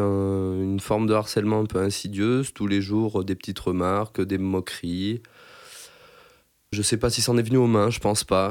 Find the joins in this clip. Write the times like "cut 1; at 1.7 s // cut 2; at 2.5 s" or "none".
cut 1; at 6.7 s